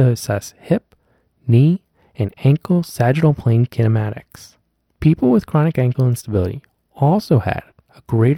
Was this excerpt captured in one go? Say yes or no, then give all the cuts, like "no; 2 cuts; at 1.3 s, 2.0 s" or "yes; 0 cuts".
no; 1 cut; at 4.8 s